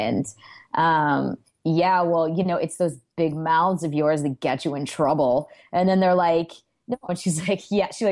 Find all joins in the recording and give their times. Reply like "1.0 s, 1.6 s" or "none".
1.4 s, 7.1 s